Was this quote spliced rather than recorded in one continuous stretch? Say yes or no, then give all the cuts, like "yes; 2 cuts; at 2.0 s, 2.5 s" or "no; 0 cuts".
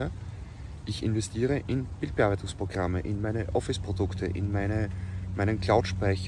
no; 0 cuts